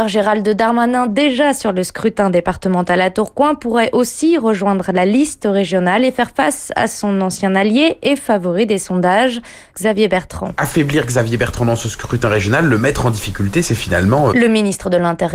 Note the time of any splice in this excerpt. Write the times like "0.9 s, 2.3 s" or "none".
9.7 s, 14.3 s